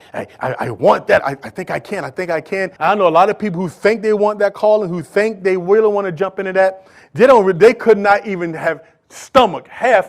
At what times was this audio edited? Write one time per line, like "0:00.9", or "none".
0:01.2
0:02.8

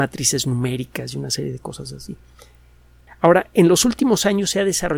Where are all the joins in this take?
0:03.1

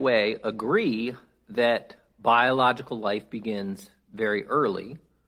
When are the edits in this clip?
none

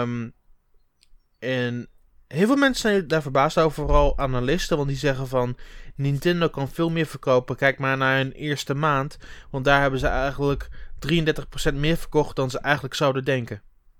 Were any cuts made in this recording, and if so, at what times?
none

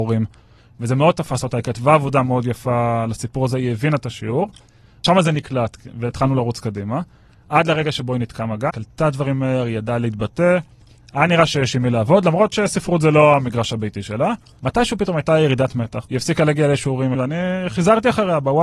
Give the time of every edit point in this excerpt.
0:08.7
0:17.1

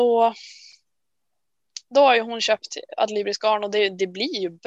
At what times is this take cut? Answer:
none

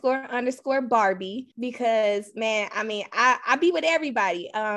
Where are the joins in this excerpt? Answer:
0:01.5

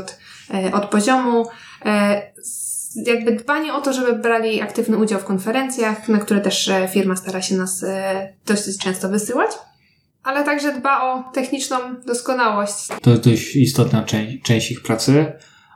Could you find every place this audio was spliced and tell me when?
0:13.0

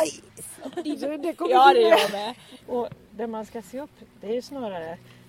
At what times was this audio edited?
0:02.6

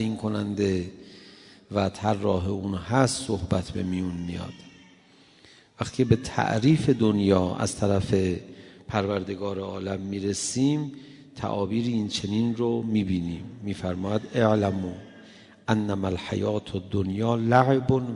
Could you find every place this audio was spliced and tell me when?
none

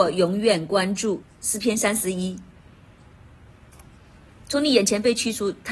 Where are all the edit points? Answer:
0:01.2

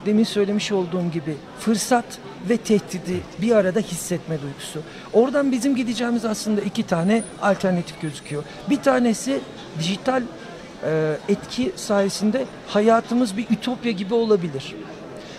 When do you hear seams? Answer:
none

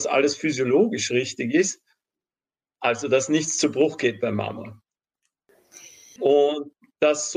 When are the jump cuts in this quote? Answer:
0:06.2

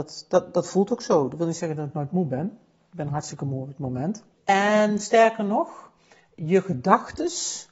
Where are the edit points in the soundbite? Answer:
0:04.4

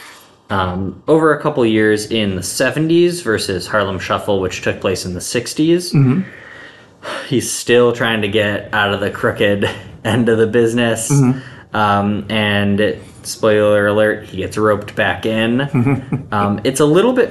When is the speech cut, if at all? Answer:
none

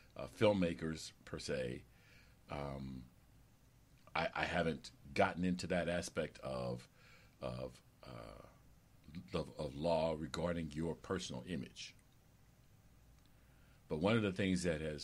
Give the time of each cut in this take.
none

